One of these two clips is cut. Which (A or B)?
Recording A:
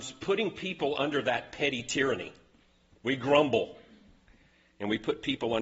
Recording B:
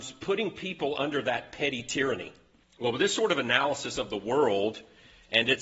B